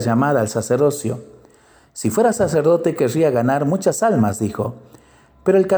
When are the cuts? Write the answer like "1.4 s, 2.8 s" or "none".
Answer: none